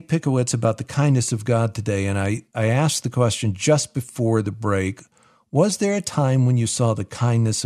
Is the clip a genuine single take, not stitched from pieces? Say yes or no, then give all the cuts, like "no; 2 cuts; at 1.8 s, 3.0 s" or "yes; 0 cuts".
yes; 0 cuts